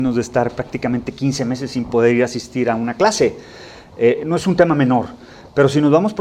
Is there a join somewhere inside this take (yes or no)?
no